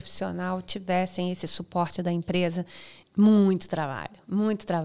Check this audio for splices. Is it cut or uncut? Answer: cut